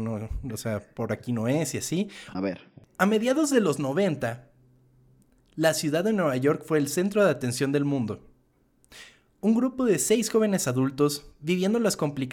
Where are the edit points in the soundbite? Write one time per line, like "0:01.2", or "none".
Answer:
0:02.3